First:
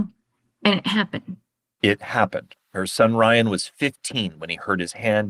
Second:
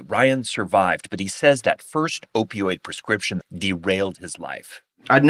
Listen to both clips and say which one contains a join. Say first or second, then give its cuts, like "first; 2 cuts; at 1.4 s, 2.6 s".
second; 1 cut; at 3.4 s